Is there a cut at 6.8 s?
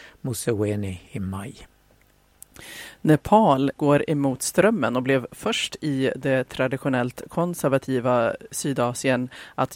no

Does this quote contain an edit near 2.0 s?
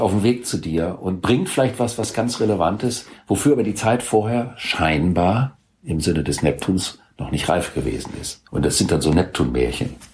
no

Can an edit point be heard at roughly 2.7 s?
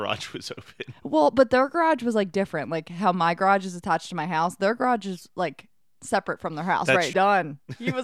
no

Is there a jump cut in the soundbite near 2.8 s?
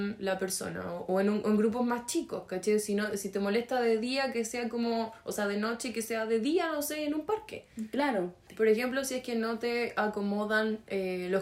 no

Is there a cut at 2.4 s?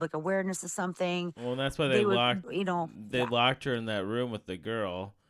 yes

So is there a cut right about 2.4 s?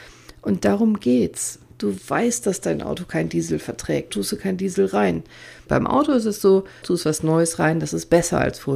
no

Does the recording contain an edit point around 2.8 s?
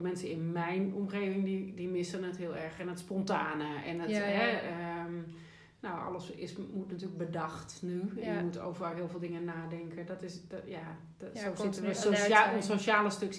no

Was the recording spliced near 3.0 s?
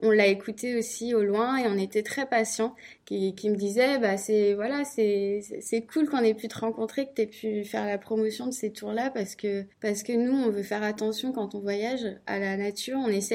yes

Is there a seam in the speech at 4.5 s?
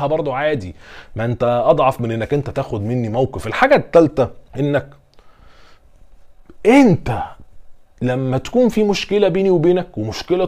yes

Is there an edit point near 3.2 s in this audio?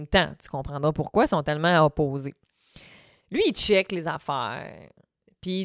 yes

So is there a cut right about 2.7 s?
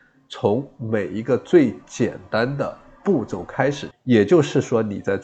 no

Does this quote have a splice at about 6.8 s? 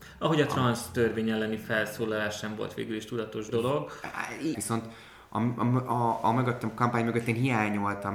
no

